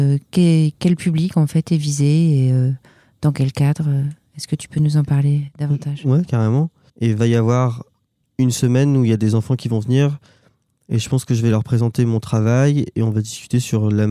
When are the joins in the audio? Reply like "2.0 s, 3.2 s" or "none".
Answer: 6.9 s